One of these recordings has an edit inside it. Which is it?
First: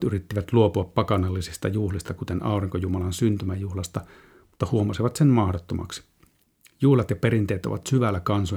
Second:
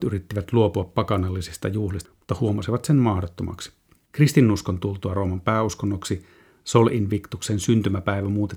second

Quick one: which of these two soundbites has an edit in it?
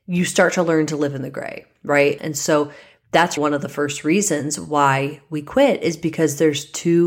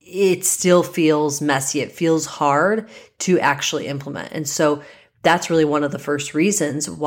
first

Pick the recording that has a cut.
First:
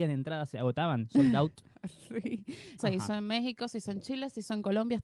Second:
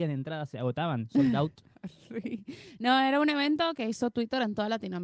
first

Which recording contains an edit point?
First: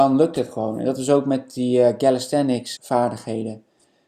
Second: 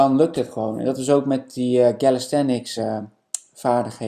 first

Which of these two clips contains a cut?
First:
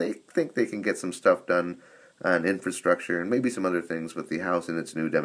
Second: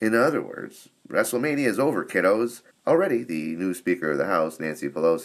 second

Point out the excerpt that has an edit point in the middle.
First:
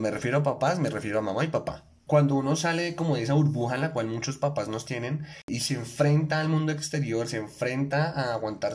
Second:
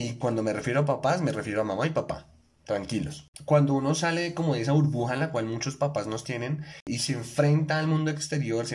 first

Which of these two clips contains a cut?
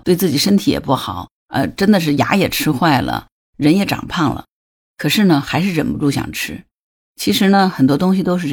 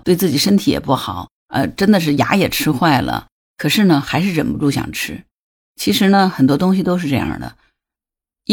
second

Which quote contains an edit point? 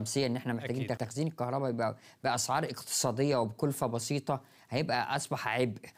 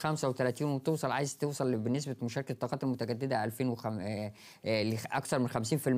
first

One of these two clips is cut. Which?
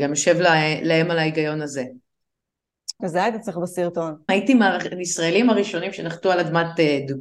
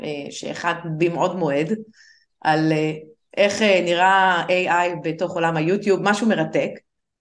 first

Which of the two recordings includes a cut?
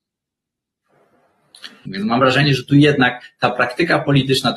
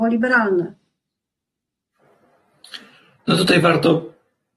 first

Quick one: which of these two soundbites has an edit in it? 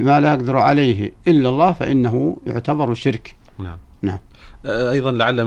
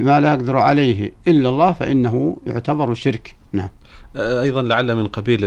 second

